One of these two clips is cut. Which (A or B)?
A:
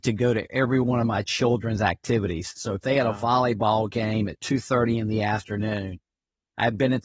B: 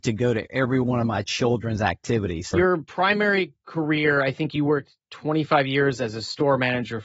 B